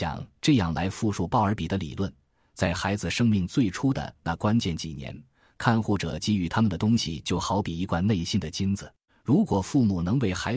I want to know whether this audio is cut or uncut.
cut